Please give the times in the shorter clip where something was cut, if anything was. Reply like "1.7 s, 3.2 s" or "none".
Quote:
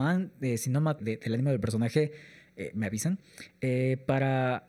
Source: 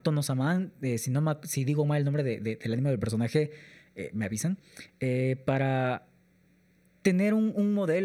1.0 s